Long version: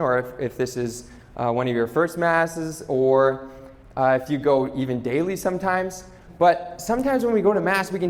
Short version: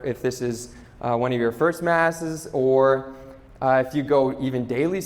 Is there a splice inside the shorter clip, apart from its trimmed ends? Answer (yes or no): no